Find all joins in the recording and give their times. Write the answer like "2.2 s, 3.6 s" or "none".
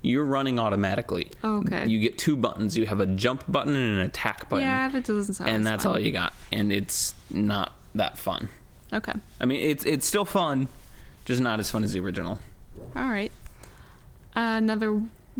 none